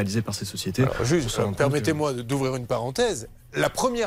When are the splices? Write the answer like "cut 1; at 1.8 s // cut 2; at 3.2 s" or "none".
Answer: none